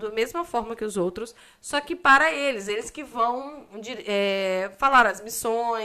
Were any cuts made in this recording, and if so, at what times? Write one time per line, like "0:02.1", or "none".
none